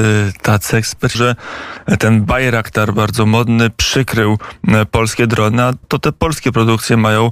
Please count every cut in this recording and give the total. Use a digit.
2